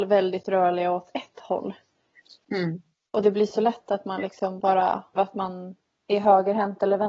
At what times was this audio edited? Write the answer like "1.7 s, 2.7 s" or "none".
5.2 s

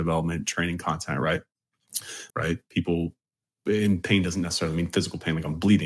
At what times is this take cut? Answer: 2.3 s

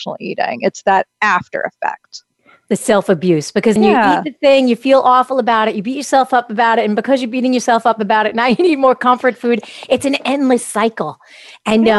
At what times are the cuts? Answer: 3.8 s

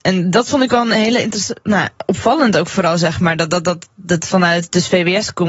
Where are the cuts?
none

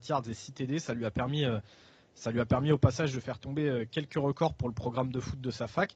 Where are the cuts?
none

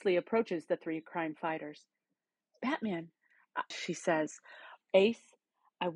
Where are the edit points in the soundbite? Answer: 3.7 s, 4.8 s

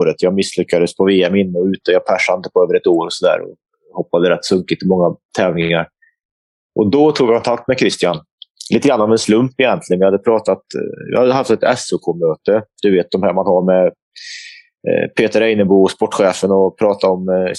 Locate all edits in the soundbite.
none

